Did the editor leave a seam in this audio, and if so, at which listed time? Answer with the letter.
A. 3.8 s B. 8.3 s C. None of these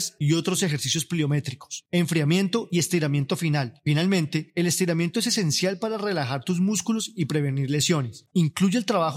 B